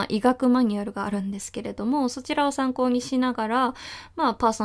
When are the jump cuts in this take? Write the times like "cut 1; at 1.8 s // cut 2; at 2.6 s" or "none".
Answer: none